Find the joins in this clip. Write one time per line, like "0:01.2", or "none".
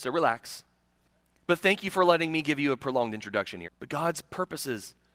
0:03.6